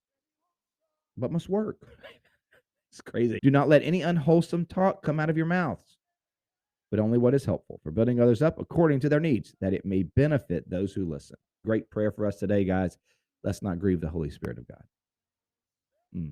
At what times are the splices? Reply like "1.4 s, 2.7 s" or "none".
1.9 s, 3.4 s, 11.6 s